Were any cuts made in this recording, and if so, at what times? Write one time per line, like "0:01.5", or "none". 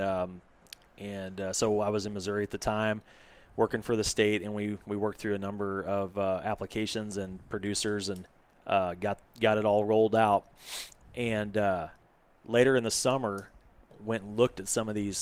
none